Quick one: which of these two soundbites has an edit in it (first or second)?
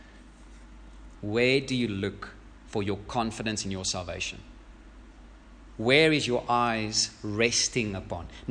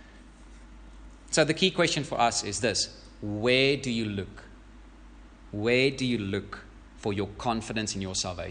first